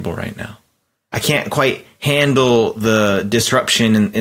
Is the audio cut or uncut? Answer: uncut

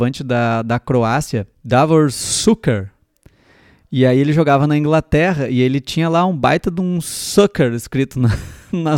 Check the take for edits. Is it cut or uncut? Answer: uncut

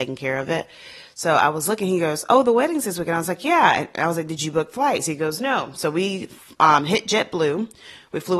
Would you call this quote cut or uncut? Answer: uncut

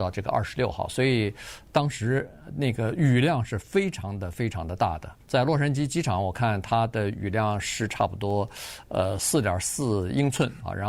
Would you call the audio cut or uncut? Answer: cut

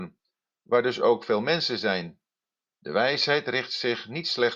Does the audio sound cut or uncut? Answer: cut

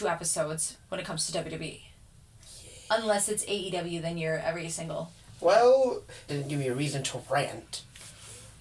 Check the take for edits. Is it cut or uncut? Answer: cut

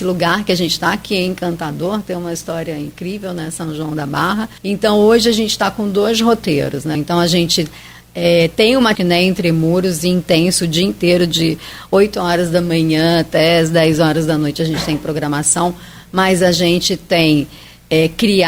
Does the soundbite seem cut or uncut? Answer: cut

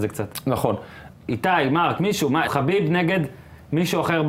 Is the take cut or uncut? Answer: cut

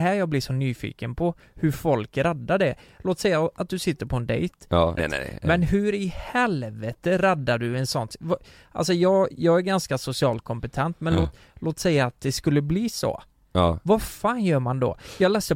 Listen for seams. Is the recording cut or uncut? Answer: cut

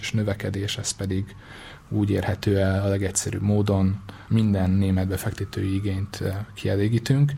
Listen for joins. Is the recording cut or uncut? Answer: cut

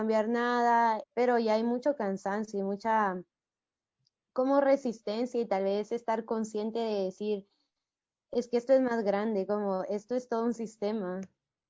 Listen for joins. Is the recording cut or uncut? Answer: cut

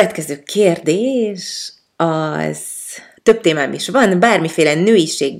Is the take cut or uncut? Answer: cut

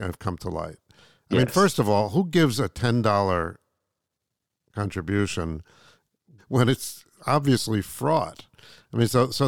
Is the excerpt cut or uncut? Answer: cut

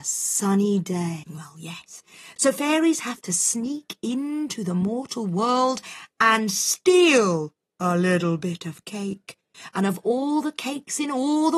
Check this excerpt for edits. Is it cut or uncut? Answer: cut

